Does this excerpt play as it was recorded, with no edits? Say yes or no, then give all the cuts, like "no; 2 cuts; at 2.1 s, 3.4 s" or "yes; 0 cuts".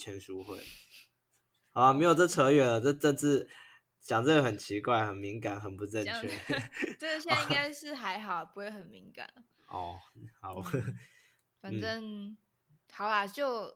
yes; 0 cuts